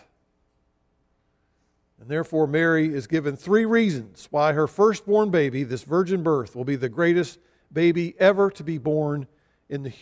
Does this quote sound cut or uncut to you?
uncut